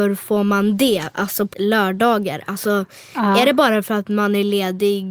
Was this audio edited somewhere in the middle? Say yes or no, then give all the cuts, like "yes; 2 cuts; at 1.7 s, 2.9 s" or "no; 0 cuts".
yes; 1 cut; at 1.5 s